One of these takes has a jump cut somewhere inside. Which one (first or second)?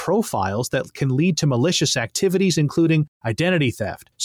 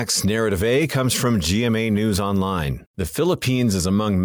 second